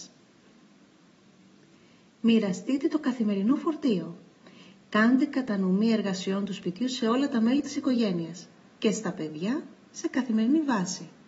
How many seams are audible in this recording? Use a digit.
0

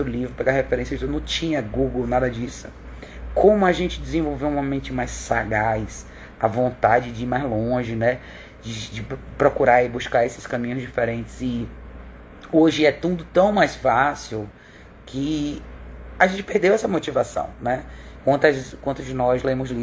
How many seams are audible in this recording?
1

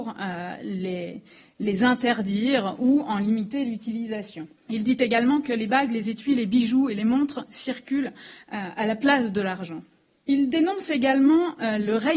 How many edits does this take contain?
1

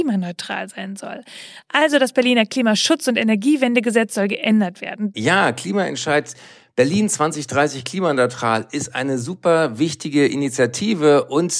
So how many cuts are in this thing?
1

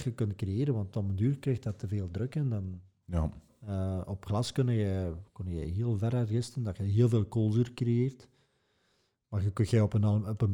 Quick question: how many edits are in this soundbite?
1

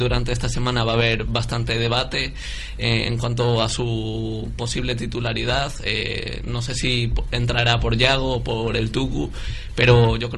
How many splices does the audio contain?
0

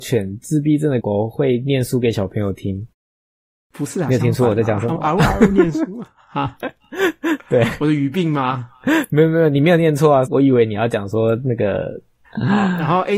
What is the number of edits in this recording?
3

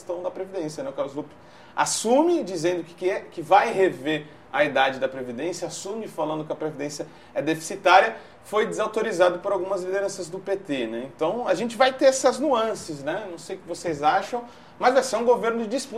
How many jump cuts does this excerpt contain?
0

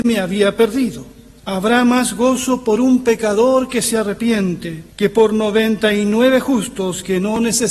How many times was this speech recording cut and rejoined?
2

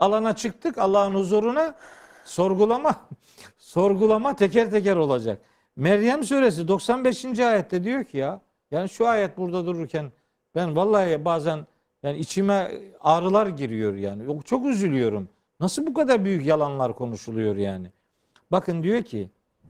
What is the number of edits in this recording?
0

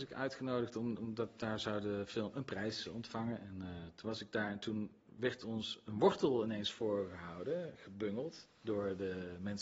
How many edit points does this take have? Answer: 0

